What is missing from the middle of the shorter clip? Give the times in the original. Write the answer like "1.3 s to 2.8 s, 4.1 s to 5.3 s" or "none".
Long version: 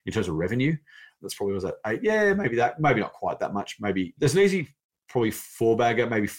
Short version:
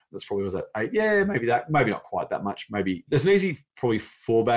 4.8 s to 5.0 s